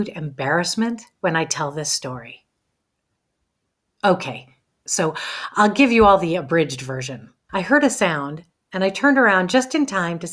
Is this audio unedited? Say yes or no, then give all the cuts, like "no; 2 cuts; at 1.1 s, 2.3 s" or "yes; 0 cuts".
no; 2 cuts; at 4.9 s, 7.5 s